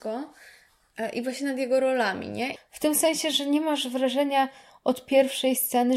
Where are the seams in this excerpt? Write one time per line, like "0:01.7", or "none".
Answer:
0:02.6